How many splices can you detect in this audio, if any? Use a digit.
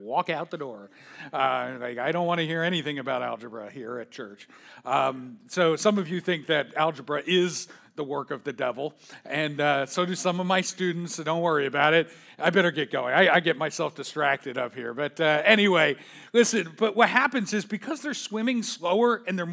0